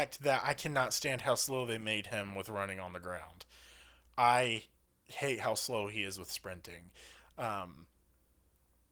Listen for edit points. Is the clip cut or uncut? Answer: uncut